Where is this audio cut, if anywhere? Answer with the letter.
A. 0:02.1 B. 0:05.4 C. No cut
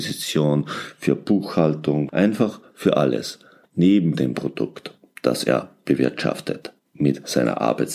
A